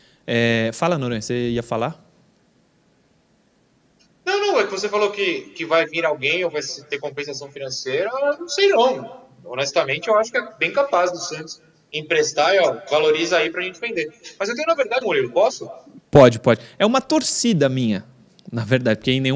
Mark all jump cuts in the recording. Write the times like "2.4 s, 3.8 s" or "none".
15.0 s